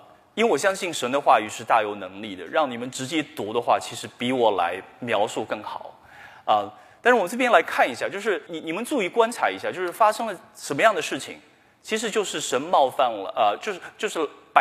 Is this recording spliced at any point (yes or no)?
yes